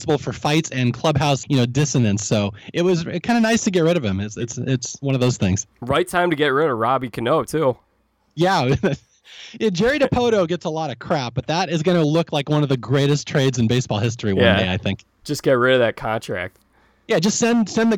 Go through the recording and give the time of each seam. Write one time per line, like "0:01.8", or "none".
0:01.4